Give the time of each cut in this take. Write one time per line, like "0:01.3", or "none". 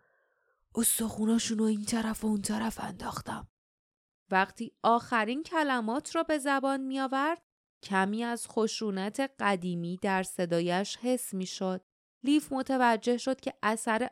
none